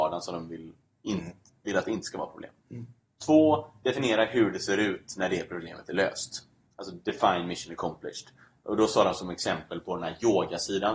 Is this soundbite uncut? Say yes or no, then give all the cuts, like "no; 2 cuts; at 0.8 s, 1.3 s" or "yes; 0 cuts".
yes; 0 cuts